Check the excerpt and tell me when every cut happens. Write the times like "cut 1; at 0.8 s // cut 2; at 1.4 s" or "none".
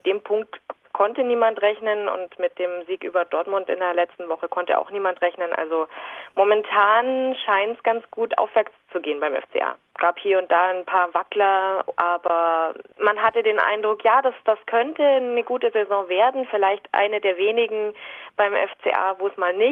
cut 1; at 9.9 s